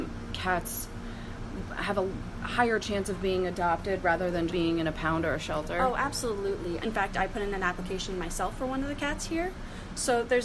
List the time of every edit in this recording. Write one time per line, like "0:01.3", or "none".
0:04.5
0:06.8